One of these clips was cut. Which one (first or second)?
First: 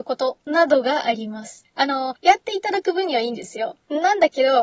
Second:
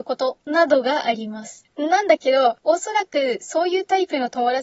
second